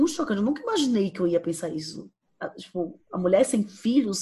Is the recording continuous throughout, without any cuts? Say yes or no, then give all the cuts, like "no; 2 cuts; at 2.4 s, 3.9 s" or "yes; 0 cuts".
yes; 0 cuts